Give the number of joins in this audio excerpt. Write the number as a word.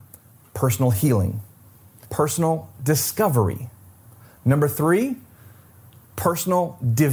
one